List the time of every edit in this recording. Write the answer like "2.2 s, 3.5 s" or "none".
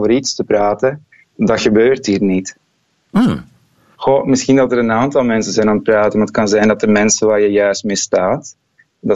3.9 s